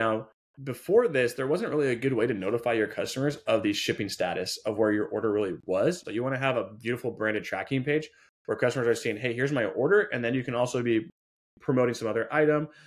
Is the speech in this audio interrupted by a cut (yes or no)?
yes